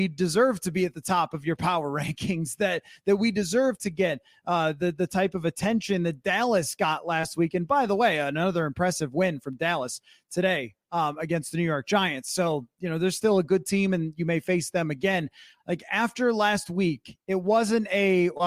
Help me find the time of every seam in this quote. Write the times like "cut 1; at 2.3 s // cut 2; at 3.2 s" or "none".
cut 1; at 15.6 s